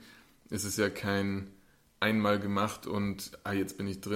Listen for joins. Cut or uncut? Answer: uncut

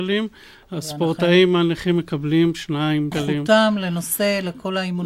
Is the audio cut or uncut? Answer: cut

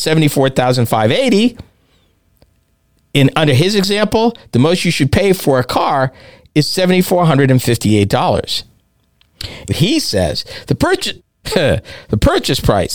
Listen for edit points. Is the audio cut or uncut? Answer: cut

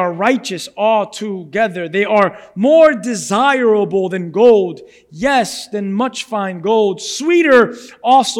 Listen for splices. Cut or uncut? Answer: uncut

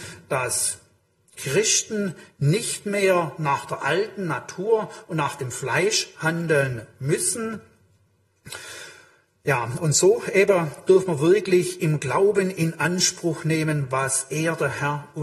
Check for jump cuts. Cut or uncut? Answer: uncut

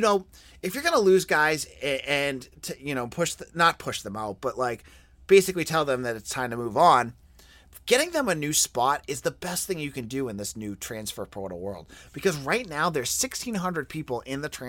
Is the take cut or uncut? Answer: uncut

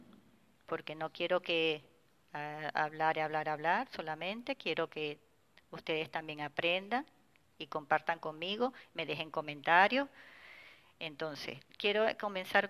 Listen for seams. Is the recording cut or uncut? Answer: uncut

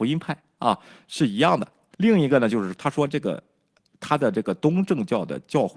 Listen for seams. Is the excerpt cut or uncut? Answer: cut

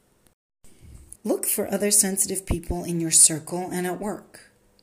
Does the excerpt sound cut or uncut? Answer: cut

